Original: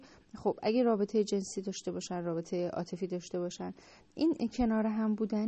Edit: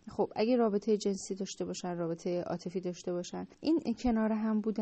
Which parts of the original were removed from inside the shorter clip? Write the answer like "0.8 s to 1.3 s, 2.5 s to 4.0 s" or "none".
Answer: 3.8 s to 4.1 s